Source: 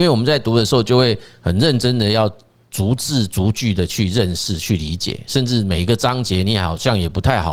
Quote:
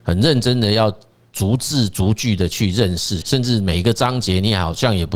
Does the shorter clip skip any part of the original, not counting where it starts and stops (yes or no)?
yes